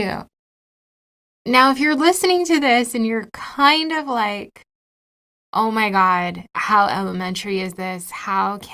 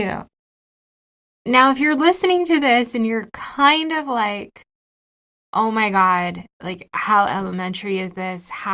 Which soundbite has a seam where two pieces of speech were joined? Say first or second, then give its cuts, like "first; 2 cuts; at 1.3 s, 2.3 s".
first; 1 cut; at 6.5 s